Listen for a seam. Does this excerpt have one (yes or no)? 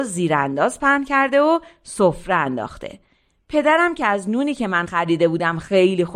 no